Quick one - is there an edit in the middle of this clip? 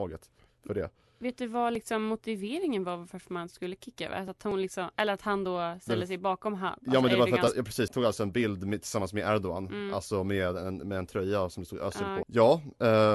yes; 2 cuts; at 7.9 s, 12.2 s

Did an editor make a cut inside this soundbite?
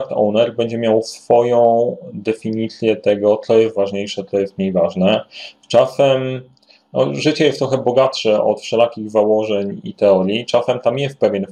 no; 0 cuts

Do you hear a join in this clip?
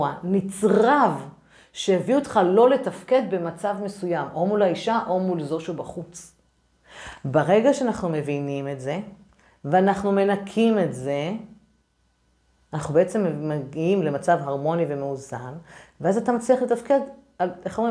no; 0 cuts

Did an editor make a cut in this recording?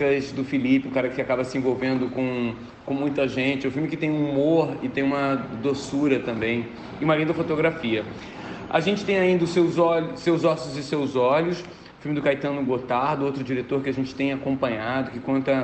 no; 0 cuts

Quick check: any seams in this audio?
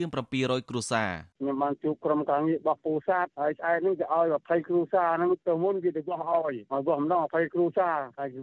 yes; 1 cut; at 1.3 s

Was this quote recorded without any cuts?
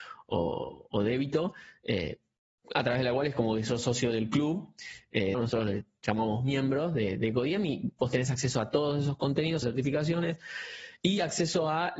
no; 2 cuts; at 5.3 s, 9.6 s

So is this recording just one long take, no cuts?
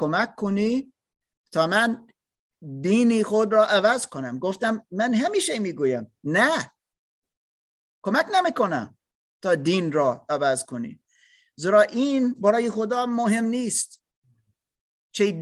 yes; 0 cuts

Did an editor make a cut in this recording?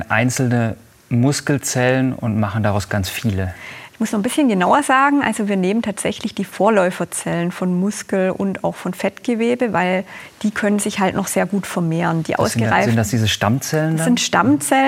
yes; 1 cut; at 2.9 s

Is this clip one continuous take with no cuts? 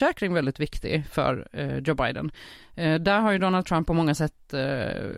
yes; 0 cuts

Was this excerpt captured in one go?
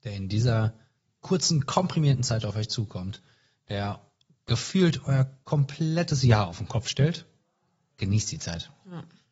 no; 1 cut; at 7.9 s

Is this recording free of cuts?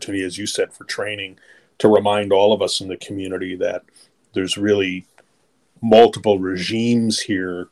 yes; 0 cuts

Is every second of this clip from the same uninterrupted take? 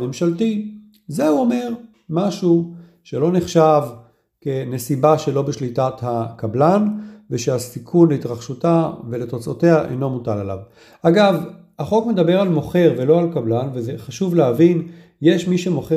yes; 0 cuts

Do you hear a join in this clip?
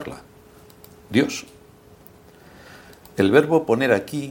no; 0 cuts

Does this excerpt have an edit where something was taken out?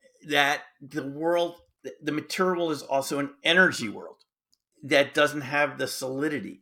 no; 0 cuts

